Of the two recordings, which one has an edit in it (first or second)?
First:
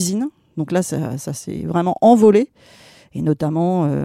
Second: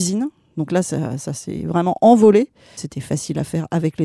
second